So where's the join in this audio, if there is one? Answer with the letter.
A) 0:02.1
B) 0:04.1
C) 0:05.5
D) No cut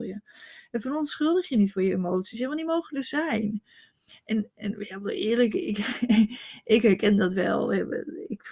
D